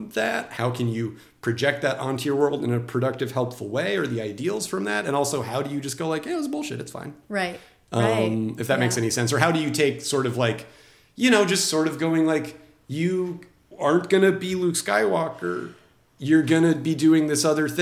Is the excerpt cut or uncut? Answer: uncut